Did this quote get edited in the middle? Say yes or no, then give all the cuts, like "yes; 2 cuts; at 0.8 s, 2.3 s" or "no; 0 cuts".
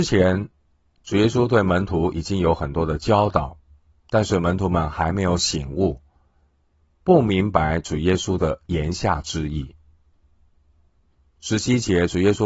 no; 0 cuts